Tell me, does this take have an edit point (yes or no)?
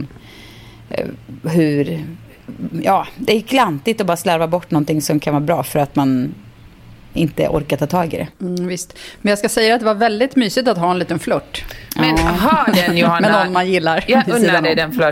no